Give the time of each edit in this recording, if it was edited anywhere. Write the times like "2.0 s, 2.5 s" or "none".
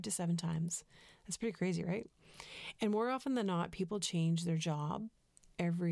none